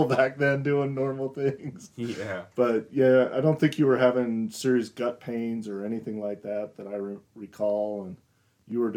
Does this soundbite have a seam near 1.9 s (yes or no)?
no